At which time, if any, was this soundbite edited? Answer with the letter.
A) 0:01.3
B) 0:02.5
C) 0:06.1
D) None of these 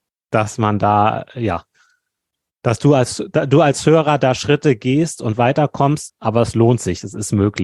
C